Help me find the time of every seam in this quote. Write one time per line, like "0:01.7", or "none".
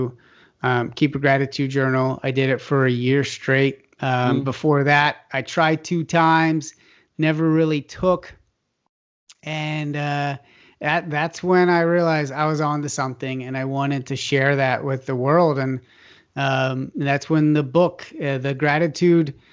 none